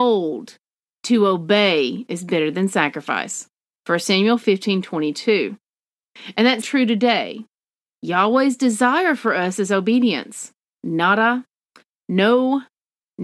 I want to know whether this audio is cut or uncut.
cut